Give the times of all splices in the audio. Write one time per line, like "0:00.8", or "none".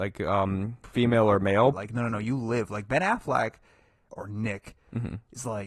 0:01.7

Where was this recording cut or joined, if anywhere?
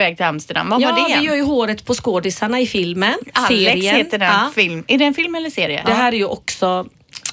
0:05.8

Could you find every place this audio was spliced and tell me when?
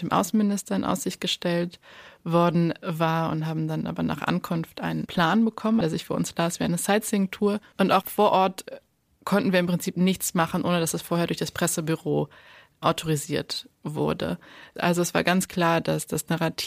0:05.8
0:07.7
0:14.8

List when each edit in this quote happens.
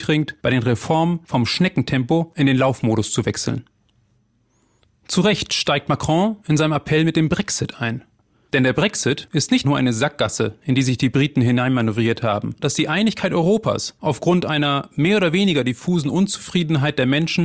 0:09.6
0:12.6

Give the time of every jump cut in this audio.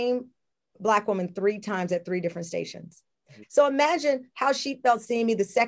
0:03.4

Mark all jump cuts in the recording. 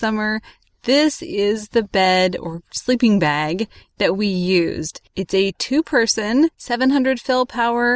0:05.1

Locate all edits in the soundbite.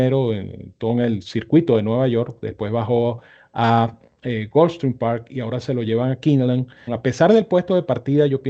0:06.9

